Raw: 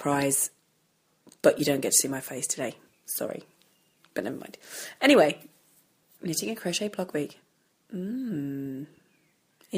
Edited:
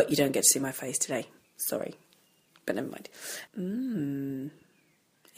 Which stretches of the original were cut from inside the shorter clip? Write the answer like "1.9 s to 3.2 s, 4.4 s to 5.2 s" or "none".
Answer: 5.0 s to 7.8 s